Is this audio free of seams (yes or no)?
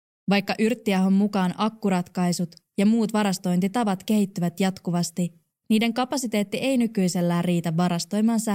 yes